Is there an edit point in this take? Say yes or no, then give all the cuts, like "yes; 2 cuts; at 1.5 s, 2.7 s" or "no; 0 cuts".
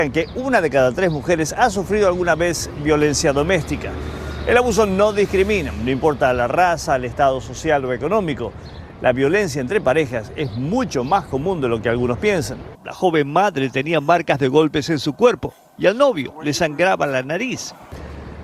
yes; 1 cut; at 12.7 s